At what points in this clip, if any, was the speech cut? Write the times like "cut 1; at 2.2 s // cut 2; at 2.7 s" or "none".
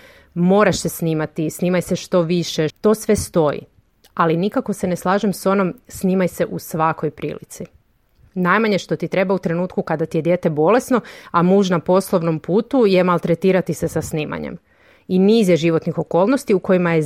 cut 1; at 2.7 s